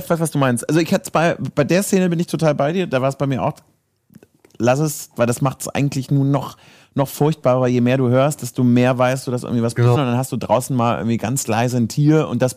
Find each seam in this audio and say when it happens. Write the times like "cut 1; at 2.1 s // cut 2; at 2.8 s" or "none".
cut 1; at 10.0 s